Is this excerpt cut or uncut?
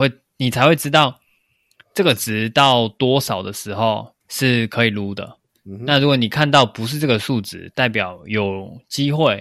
cut